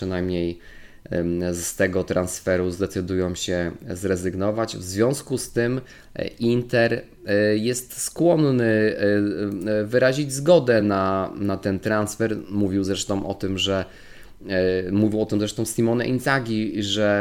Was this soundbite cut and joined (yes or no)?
no